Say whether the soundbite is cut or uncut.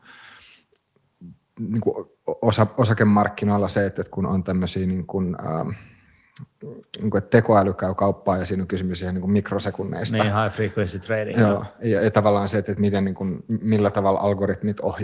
uncut